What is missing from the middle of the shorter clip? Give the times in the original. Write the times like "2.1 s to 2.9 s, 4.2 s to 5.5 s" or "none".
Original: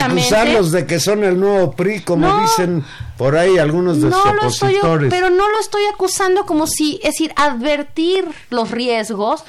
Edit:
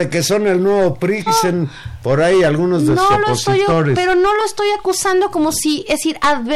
2.0 s to 2.4 s